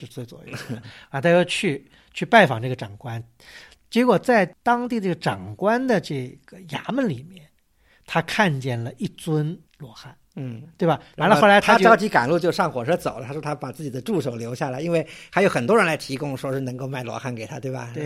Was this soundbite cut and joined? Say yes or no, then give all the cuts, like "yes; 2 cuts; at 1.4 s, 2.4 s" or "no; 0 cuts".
yes; 2 cuts; at 9.7 s, 11.1 s